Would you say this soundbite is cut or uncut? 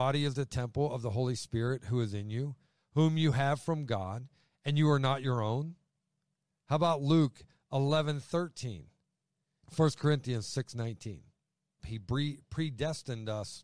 cut